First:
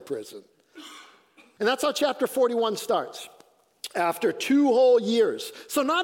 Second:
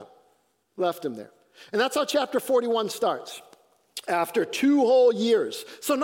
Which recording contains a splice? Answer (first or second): first